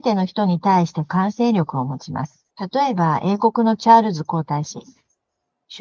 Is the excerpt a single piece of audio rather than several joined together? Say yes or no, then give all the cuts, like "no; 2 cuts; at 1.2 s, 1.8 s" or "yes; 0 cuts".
no; 1 cut; at 2.5 s